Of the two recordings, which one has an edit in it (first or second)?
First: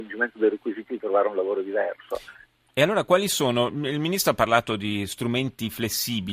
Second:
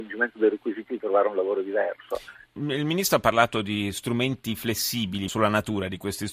second